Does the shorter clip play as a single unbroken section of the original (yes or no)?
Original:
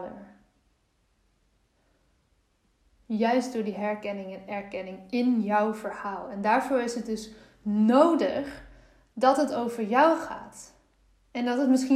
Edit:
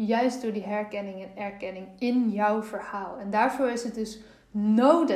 yes